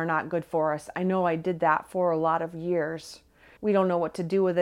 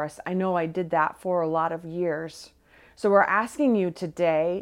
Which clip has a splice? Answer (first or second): first